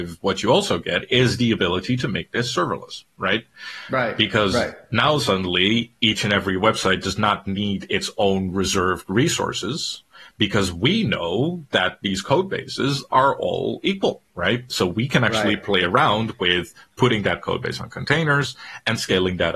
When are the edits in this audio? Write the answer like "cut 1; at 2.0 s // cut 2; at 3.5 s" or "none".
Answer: none